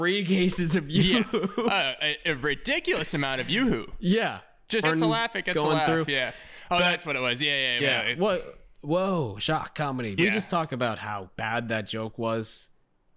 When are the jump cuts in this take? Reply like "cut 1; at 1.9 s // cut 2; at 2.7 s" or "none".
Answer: cut 1; at 4.8 s // cut 2; at 7.8 s // cut 3; at 10.2 s